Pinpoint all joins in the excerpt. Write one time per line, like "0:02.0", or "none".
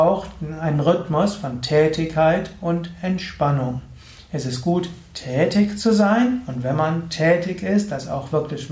none